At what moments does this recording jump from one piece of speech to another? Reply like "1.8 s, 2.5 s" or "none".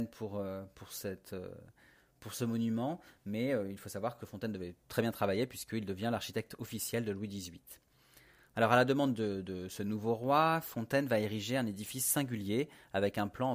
none